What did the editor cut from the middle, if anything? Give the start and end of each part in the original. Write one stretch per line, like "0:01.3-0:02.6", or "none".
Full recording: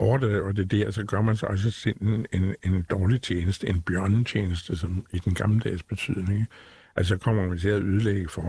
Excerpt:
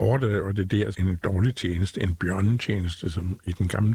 0:00.9-0:02.6